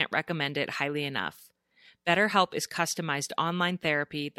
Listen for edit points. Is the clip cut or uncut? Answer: uncut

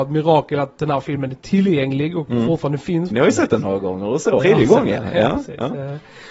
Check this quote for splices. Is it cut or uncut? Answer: cut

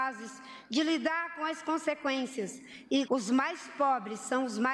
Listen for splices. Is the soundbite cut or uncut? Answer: cut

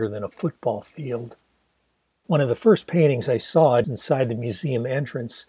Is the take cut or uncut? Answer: cut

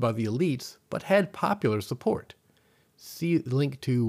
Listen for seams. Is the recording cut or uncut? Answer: uncut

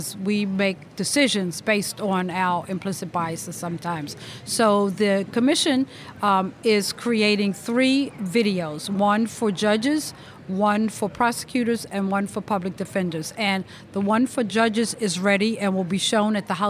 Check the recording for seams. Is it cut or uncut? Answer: uncut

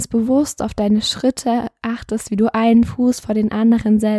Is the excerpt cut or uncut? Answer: uncut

